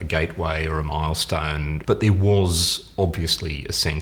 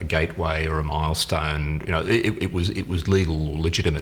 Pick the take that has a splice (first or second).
first